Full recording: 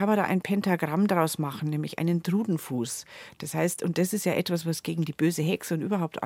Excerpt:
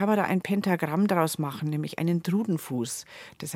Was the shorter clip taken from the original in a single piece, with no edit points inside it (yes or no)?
yes